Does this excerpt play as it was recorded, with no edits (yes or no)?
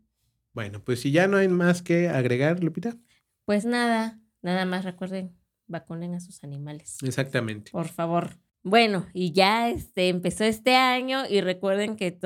yes